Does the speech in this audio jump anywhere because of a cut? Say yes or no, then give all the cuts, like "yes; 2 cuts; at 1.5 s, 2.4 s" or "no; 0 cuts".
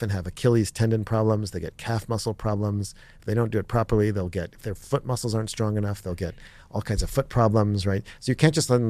no; 0 cuts